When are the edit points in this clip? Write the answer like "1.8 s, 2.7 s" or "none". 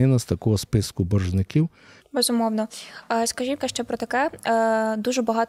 2.0 s, 3.6 s